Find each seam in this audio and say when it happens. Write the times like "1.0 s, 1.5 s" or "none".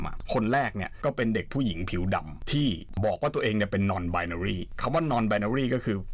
none